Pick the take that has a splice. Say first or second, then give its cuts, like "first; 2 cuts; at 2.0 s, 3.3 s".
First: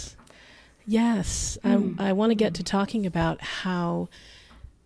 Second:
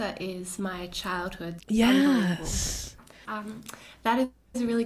second; 2 cuts; at 1.6 s, 3.2 s